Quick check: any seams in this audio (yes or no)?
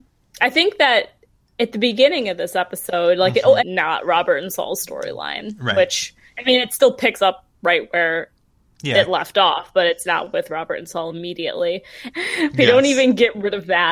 yes